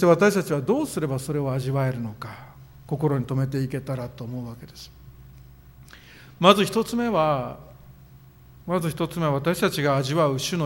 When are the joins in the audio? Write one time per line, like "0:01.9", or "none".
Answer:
none